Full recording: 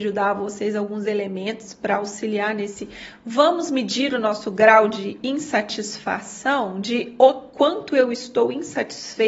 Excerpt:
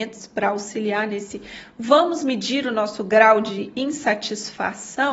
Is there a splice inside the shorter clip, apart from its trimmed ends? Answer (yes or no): no